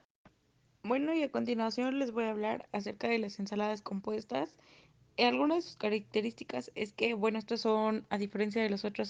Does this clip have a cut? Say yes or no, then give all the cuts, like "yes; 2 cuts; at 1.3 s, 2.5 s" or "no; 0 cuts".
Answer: no; 0 cuts